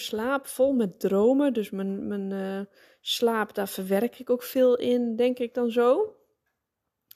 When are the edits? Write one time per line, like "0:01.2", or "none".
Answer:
none